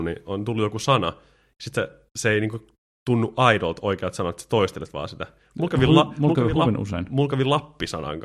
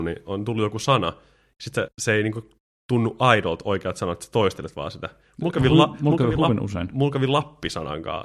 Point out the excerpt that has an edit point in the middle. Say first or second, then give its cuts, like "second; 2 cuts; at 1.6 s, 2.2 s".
second; 1 cut; at 1.9 s